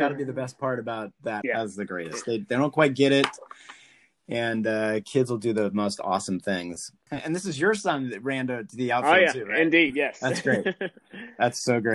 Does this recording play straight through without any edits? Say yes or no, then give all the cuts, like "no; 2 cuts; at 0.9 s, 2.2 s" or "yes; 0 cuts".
no; 1 cut; at 1.4 s